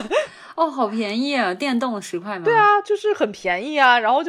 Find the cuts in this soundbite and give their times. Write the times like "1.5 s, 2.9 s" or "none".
none